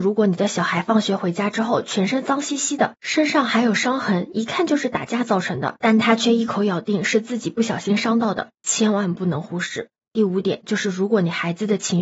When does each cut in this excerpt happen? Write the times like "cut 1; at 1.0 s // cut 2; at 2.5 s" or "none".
none